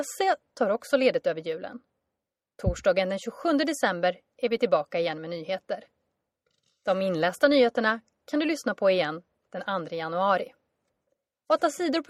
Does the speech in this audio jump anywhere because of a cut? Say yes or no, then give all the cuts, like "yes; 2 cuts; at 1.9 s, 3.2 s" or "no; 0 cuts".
no; 0 cuts